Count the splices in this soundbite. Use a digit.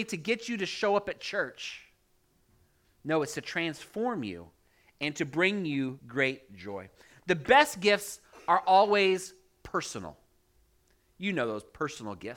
1